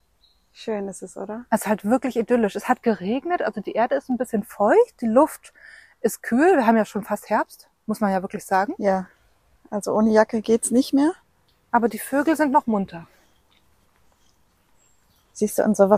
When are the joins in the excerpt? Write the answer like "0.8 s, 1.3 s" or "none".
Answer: none